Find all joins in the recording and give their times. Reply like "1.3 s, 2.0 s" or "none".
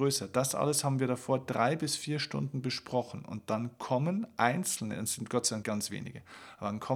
5.6 s